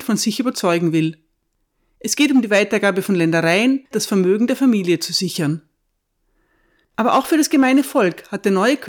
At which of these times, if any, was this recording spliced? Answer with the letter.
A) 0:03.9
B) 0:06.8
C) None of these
A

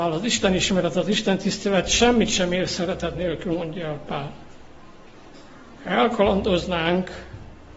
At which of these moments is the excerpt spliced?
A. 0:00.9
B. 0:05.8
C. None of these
B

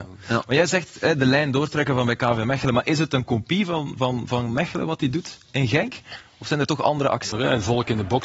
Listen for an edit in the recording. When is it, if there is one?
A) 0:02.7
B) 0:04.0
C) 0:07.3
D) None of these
C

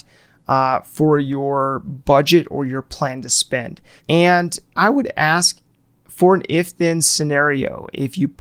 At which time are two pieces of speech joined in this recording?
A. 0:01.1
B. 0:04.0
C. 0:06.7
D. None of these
B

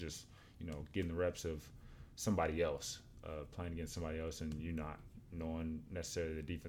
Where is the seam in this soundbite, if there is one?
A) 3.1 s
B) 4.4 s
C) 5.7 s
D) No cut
D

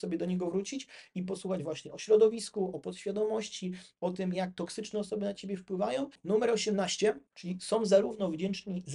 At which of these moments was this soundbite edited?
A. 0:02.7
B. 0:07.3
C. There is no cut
B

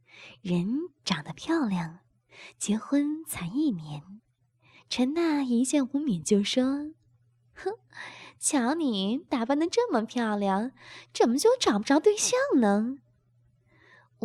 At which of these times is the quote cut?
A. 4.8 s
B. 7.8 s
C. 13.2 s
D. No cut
A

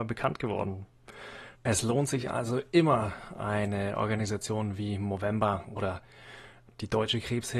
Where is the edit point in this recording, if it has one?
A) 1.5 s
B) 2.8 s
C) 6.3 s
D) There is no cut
A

